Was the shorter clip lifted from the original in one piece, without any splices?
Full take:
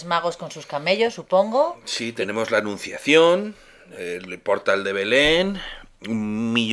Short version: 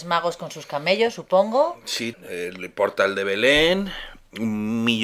no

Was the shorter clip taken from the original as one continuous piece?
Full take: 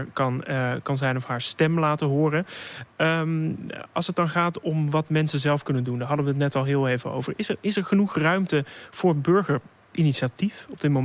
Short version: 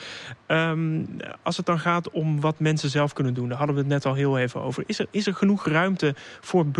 yes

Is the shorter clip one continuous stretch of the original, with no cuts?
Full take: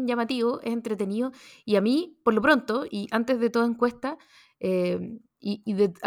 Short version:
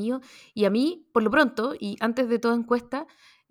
yes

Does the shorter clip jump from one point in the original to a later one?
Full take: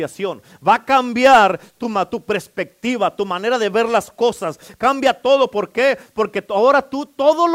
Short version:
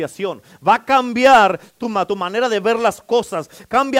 yes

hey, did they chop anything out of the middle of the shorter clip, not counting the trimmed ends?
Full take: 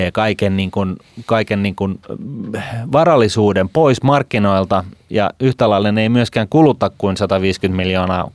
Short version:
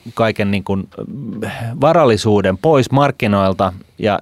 no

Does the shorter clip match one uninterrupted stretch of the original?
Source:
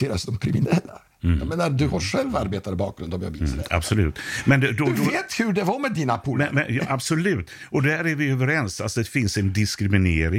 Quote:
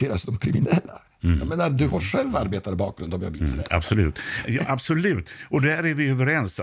no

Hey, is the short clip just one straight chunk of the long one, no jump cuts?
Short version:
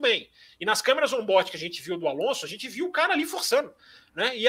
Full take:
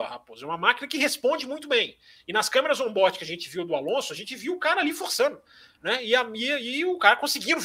yes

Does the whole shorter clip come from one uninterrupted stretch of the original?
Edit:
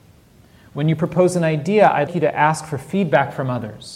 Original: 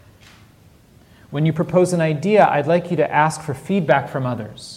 no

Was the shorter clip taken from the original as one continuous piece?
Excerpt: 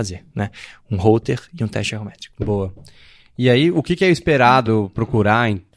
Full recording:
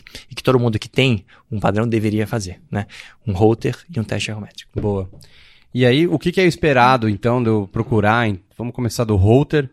no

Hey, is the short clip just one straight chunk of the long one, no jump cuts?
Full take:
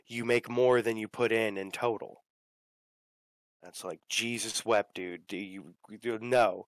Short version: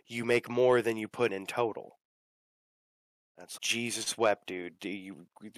no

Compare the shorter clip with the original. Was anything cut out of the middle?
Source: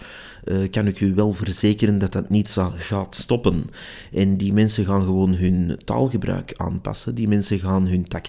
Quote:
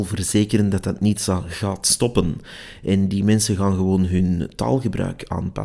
no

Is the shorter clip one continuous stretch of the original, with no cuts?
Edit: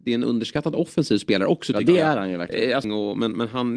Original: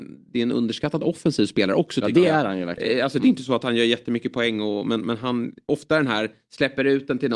no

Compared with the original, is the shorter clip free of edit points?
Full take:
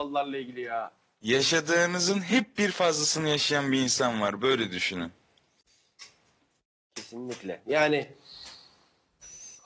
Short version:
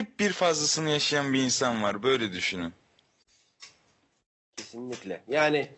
yes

